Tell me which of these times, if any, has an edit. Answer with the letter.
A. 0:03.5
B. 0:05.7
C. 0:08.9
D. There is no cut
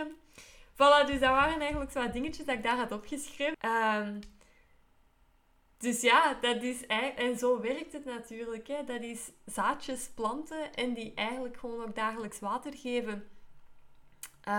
A